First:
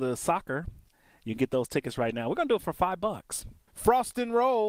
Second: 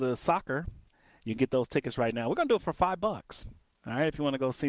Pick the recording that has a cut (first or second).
first